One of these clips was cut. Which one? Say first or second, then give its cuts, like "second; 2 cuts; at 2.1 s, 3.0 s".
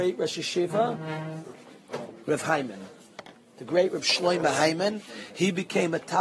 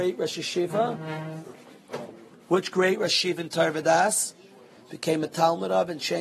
first; 1 cut; at 2.2 s